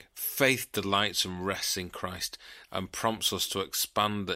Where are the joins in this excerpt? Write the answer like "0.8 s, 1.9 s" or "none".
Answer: 2.7 s